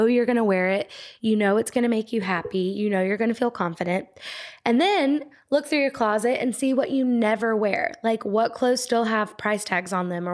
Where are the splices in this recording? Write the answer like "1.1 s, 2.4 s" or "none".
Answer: none